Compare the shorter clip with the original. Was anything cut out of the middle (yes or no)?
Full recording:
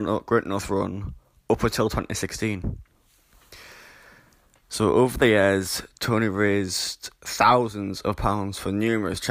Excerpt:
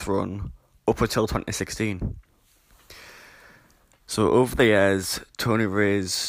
no